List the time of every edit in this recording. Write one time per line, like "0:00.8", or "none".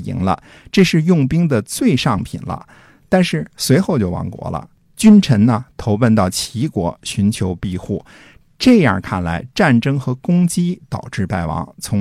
none